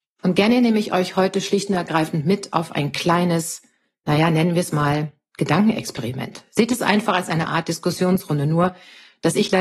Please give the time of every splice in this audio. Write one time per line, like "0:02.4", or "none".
none